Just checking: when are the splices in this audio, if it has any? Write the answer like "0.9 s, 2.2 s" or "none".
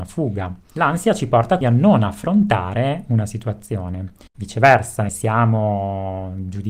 1.6 s, 5.1 s